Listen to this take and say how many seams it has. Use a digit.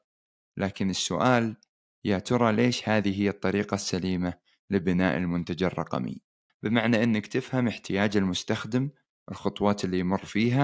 1